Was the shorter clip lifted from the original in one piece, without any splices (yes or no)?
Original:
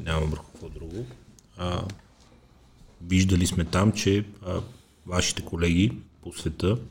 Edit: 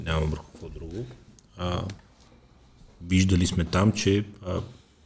yes